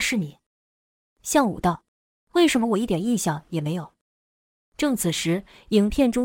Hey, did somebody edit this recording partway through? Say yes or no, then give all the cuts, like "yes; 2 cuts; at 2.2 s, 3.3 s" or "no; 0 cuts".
no; 0 cuts